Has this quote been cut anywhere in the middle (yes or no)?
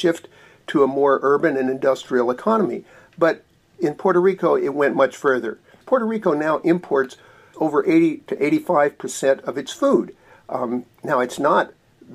yes